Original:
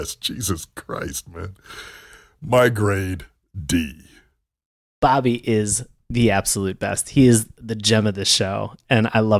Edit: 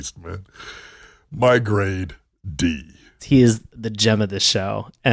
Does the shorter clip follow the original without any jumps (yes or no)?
no